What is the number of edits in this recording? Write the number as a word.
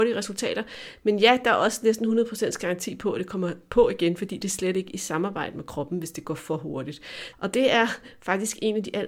one